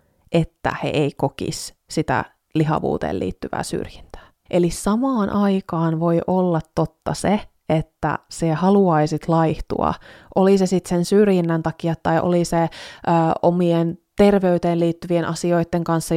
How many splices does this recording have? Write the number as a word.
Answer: one